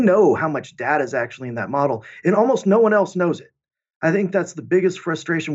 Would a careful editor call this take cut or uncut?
uncut